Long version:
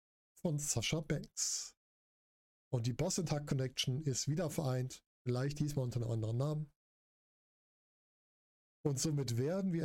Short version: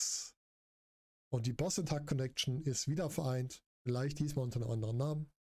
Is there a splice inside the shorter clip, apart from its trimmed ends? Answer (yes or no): no